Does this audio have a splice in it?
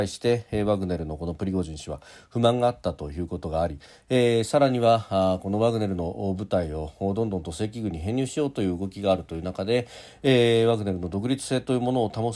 no; 0 cuts

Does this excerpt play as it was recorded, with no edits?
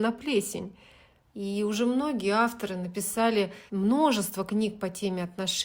no; 2 cuts; at 1.2 s, 3.7 s

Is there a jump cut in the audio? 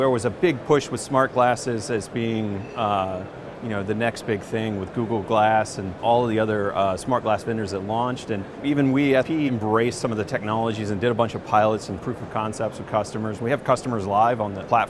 yes; 1 cut; at 9.2 s

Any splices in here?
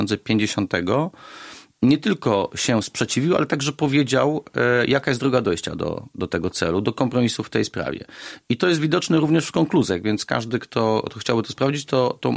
no; 0 cuts

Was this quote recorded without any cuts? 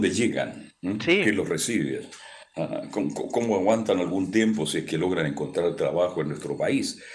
yes; 0 cuts

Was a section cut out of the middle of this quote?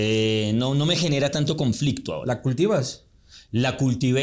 no; 0 cuts

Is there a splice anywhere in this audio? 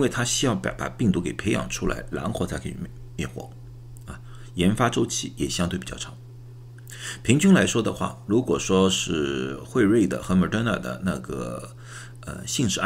yes; 2 cuts; at 4.1 s, 8.3 s

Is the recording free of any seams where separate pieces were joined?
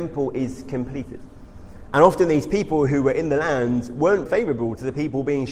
no; 2 cuts; at 1.9 s, 4.3 s

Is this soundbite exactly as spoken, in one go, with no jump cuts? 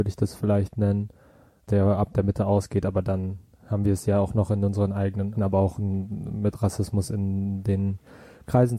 no; 1 cut; at 5.3 s

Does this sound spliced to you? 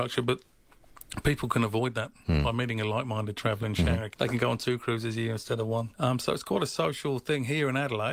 yes; 2 cuts; at 4.1 s, 5.9 s

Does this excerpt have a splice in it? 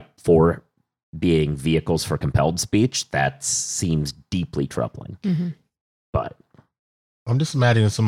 no; 0 cuts

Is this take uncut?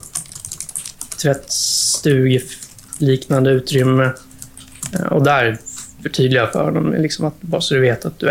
yes; 0 cuts

